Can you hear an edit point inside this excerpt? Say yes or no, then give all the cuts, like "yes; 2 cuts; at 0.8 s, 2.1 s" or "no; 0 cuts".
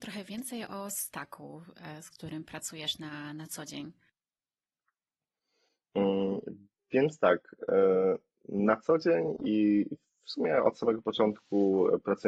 no; 0 cuts